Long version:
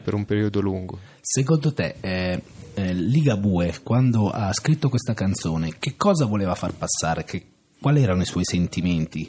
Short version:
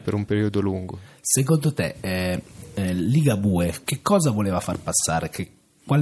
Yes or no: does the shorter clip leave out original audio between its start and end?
yes